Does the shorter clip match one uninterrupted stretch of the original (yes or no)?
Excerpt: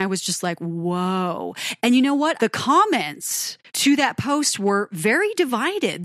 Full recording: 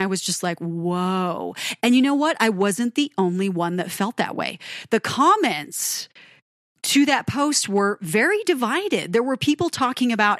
no